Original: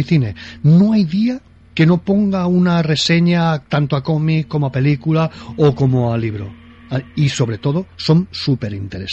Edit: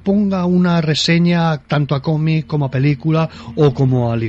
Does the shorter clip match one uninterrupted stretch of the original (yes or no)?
yes